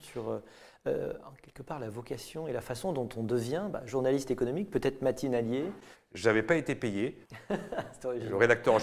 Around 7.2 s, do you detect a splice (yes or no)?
yes